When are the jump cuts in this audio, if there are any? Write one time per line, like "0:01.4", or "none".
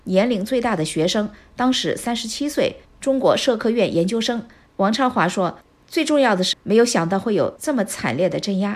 0:04.7
0:06.5